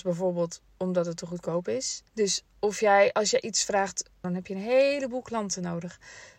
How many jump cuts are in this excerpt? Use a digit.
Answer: 2